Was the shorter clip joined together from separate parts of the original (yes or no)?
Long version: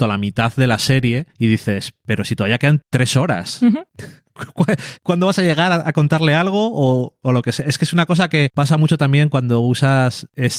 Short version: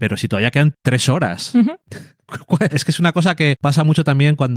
yes